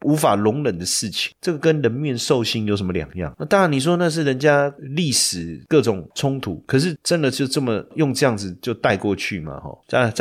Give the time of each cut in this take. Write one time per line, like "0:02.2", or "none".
none